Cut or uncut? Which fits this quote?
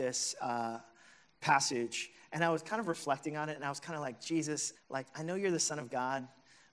cut